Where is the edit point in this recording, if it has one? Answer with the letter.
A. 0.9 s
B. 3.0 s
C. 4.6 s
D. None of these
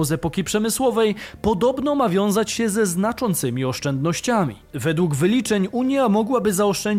D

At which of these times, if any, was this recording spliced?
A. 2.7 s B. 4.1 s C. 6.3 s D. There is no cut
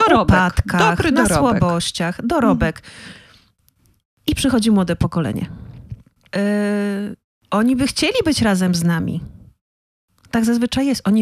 C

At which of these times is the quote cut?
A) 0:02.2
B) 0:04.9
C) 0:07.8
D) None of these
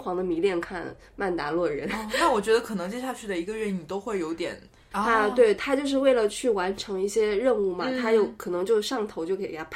B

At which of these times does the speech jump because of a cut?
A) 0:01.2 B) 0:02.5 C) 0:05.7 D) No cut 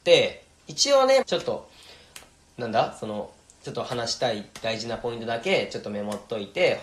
A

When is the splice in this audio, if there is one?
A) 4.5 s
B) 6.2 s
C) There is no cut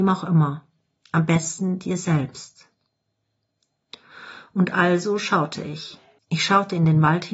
B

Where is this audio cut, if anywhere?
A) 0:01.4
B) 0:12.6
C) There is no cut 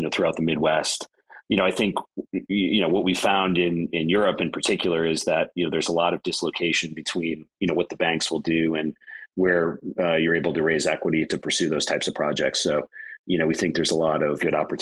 A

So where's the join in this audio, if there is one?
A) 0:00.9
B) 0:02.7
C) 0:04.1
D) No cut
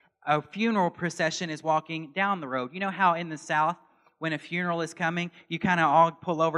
D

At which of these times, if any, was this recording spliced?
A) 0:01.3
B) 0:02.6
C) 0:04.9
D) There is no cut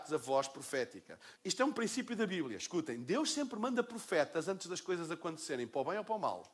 A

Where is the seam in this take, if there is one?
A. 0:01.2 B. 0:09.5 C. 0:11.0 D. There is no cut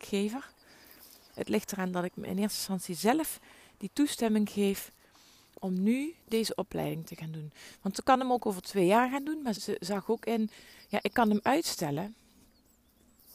B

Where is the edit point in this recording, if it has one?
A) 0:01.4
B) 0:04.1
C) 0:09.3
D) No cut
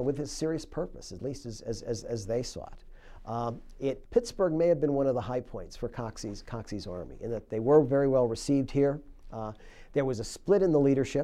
B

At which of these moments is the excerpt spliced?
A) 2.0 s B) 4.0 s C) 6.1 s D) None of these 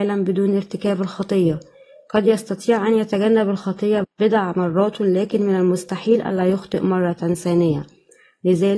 B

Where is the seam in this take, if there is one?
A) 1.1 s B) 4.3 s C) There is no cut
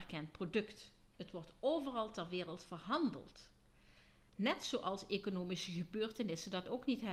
B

